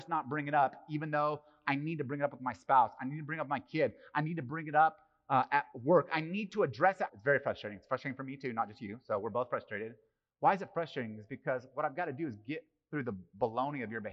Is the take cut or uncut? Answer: cut